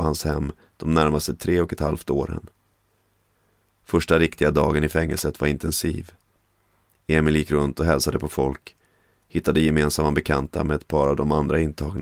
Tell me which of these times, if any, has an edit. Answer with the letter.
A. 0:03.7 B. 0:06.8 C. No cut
C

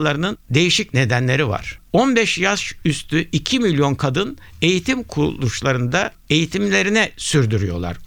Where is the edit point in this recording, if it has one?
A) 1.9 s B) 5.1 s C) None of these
A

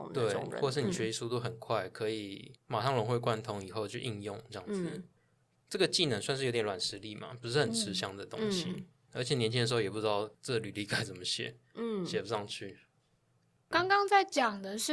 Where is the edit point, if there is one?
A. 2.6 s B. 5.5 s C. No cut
A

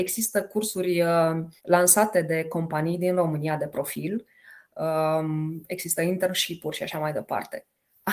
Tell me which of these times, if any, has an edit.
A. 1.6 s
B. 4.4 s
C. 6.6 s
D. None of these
A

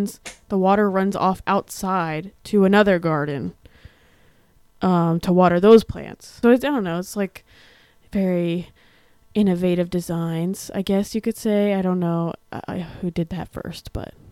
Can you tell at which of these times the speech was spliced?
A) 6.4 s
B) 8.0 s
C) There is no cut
A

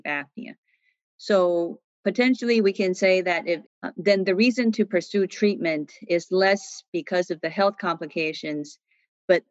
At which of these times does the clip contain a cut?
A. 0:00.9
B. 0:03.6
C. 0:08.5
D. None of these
B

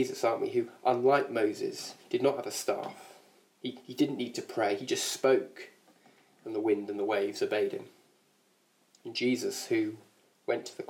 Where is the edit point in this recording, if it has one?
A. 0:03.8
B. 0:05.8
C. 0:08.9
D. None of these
D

